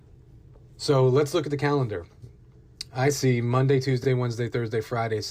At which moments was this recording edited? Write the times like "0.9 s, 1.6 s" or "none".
none

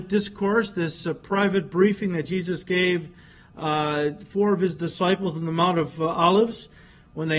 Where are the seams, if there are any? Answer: none

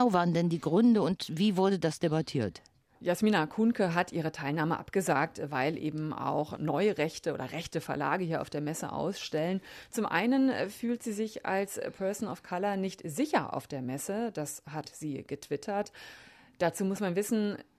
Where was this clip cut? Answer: 6.6 s

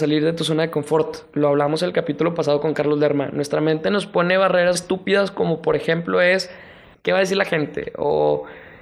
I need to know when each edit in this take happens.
4.8 s, 6.9 s

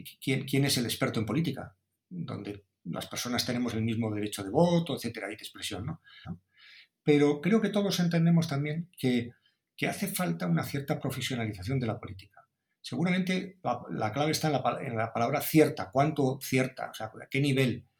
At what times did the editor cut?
6.2 s

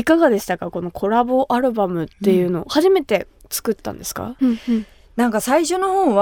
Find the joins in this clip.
4.4 s

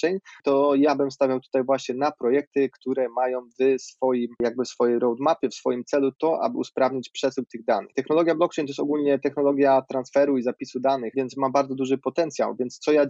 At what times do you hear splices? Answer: 7.9 s, 11.1 s

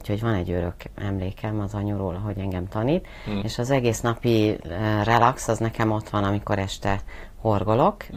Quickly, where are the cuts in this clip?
3.4 s

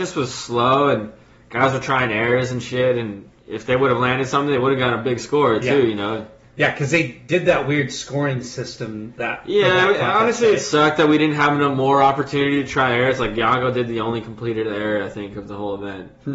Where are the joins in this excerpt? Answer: 3.4 s

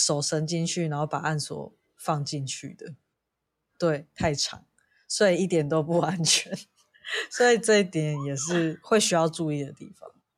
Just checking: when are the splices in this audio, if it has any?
3.7 s

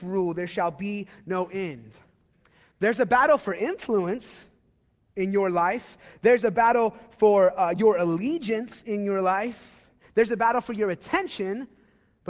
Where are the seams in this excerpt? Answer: none

